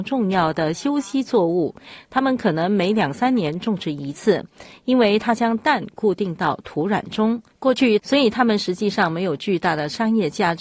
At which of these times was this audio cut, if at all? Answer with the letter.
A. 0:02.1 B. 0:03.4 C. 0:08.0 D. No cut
C